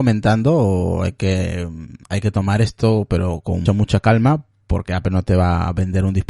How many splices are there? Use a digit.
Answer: 2